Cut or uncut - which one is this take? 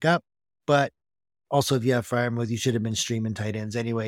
uncut